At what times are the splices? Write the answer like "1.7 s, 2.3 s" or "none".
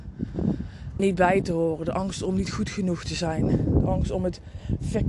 1.0 s